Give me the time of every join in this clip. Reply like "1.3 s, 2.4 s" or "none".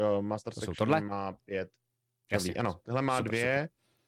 none